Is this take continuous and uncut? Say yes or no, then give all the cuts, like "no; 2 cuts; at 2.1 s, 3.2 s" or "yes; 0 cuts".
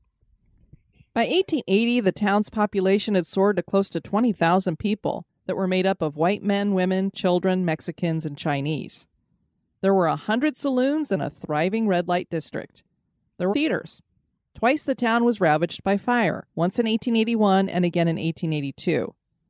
no; 2 cuts; at 13.5 s, 16.5 s